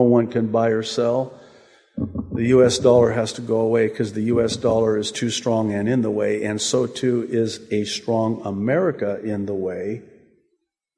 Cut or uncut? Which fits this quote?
uncut